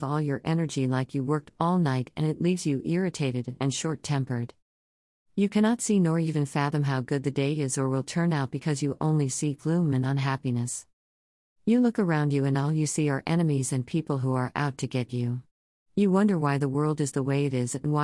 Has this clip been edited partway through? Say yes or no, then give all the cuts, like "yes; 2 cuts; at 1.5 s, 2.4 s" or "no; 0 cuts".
no; 0 cuts